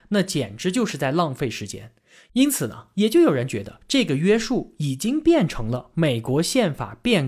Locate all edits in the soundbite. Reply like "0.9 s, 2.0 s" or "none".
none